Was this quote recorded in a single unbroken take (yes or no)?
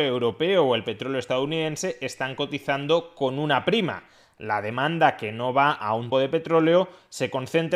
no